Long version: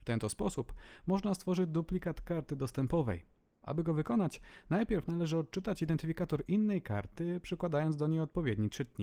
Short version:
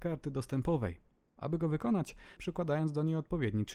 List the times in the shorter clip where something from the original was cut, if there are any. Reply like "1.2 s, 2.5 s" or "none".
2.4 s